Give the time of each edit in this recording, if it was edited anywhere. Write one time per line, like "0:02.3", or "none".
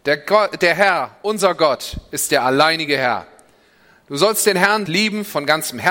0:04.9